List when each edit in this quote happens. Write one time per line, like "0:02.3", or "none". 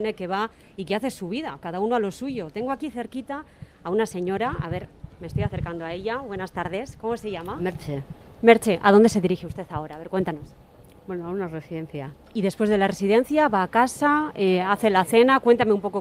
none